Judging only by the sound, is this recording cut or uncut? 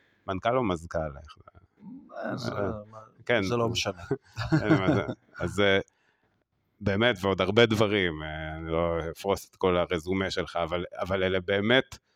uncut